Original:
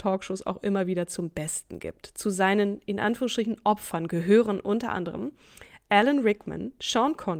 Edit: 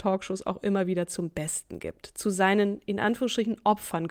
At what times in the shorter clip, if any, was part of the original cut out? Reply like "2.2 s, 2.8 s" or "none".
none